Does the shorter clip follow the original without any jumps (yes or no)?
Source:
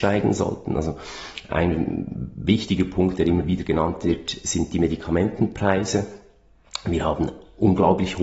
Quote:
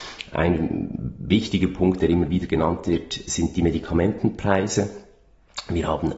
yes